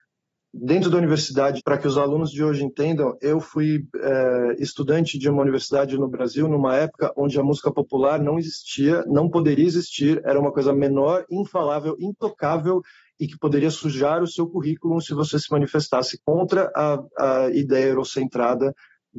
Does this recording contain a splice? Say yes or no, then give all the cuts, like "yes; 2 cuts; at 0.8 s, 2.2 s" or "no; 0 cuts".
yes; 1 cut; at 1.6 s